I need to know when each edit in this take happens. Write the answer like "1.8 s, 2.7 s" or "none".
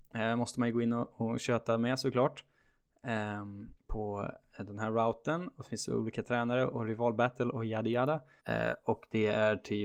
3.8 s, 8.4 s